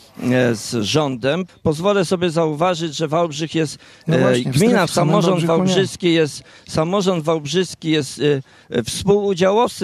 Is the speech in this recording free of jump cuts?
no; 2 cuts; at 1.5 s, 4.9 s

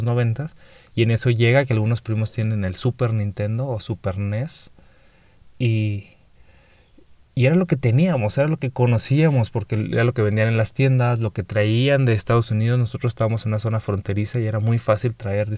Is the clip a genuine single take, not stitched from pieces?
yes; 0 cuts

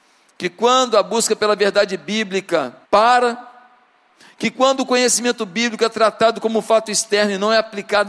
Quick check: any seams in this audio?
yes; 1 cut; at 2.8 s

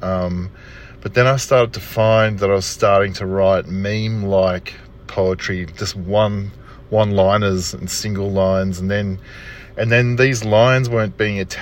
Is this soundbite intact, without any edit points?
yes; 0 cuts

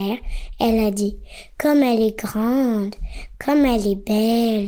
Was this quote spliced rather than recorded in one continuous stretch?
no; 0 cuts

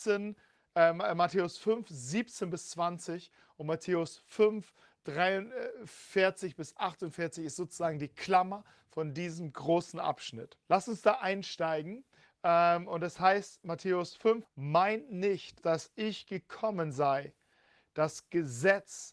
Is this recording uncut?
no; 3 cuts; at 10.6 s, 14.4 s, 15.6 s

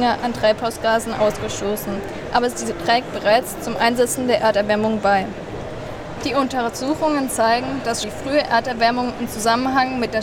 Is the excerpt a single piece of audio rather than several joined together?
no; 2 cuts; at 6.2 s, 8.0 s

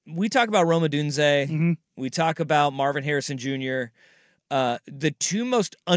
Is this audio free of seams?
yes; 0 cuts

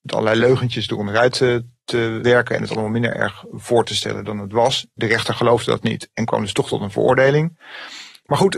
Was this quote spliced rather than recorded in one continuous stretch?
no; 0 cuts

